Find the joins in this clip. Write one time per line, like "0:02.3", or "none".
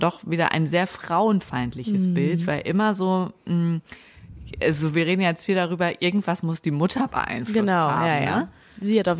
none